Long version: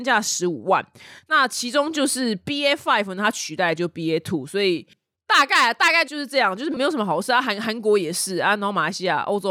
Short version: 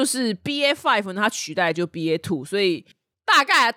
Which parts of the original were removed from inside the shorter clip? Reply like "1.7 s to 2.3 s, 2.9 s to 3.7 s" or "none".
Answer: none